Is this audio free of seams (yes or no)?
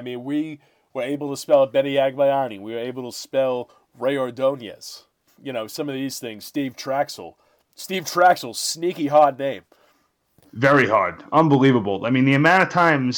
yes